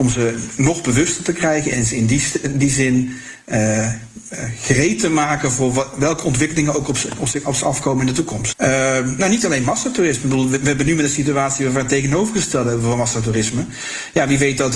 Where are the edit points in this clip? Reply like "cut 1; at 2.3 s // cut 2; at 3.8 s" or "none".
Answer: cut 1; at 8.5 s